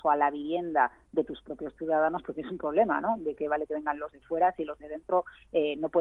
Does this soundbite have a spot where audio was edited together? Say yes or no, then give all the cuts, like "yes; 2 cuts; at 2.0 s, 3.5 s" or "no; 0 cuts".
no; 0 cuts